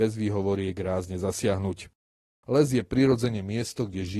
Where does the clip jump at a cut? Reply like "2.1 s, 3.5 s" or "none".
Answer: 2.4 s